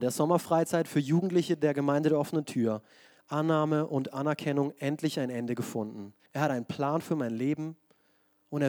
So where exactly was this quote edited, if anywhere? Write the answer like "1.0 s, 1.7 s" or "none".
3.1 s, 6.3 s